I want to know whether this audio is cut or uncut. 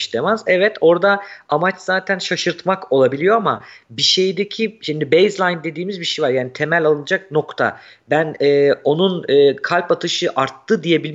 uncut